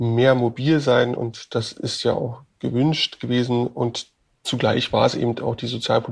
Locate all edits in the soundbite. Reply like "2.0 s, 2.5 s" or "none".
none